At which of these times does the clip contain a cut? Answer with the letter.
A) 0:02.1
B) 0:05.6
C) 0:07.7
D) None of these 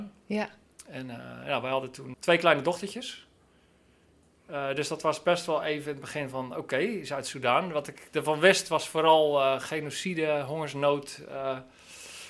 A